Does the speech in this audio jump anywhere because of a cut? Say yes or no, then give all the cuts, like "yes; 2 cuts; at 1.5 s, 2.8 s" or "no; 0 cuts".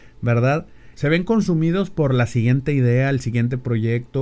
yes; 1 cut; at 1.0 s